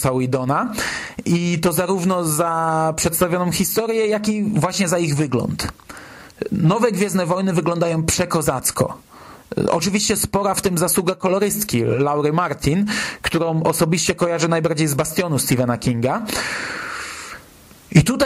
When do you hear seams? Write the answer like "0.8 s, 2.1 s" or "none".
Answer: none

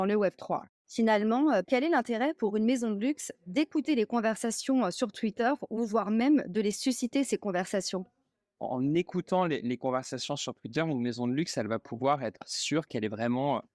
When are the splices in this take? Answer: 1.6 s, 8.6 s

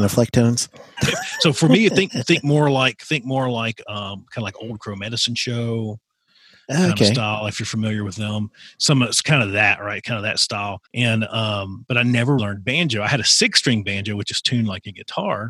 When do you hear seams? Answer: 1.0 s, 10.9 s, 12.4 s

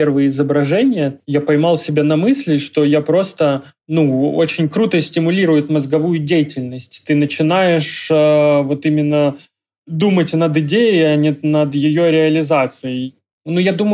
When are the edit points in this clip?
none

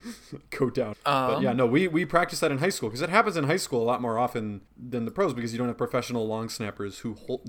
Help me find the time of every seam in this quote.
0.9 s, 4.7 s

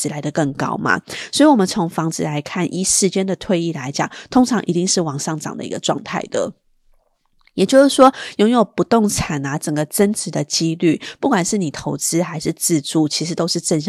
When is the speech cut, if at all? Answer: none

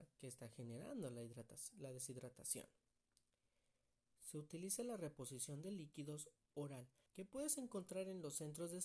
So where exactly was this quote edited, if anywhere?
4.1 s, 7.1 s

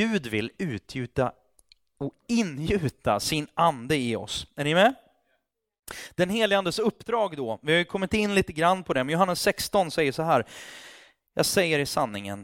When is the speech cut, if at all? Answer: none

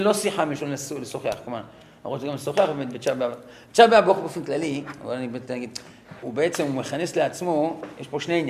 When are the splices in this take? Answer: 6.2 s

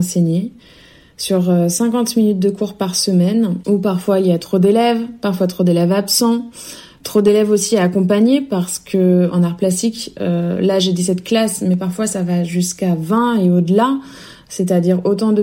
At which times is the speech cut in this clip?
none

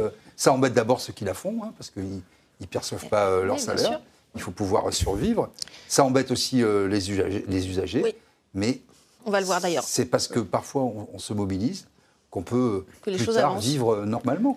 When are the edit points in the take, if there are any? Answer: none

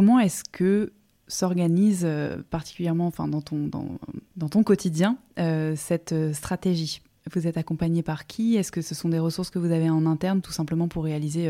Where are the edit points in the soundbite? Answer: 4.3 s, 10.4 s

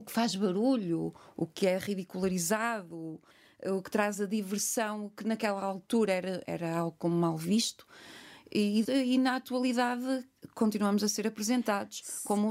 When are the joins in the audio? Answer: 8.8 s

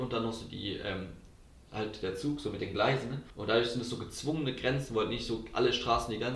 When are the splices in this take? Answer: 3.3 s

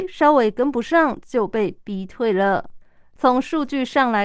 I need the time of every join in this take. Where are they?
3.2 s

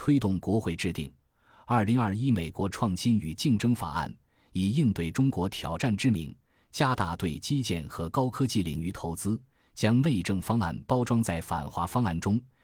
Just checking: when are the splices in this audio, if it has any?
none

